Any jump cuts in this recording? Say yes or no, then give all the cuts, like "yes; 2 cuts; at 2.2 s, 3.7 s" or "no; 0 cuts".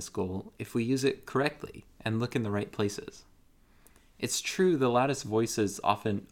no; 0 cuts